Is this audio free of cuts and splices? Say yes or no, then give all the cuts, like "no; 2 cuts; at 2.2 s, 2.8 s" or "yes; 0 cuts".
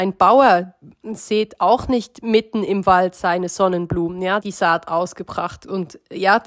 no; 1 cut; at 4.4 s